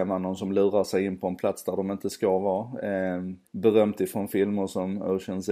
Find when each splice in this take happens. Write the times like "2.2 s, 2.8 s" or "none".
3.4 s